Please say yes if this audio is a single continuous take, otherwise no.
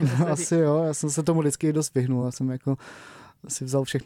yes